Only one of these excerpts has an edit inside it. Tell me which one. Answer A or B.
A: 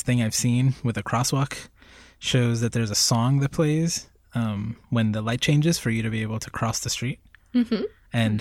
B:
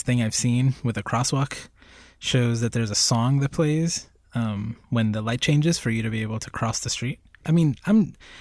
B